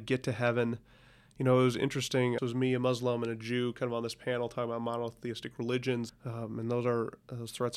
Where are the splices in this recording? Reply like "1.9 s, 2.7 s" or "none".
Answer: 2.4 s, 6.1 s